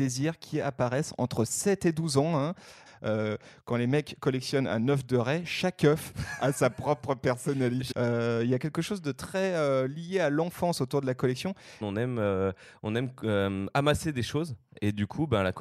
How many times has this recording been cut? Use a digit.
3